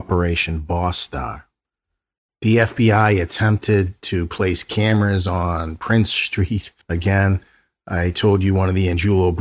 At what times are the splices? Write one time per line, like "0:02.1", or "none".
0:06.8